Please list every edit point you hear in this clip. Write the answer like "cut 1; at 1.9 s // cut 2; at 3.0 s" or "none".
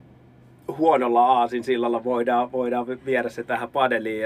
none

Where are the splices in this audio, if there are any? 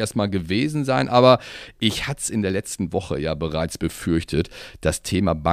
none

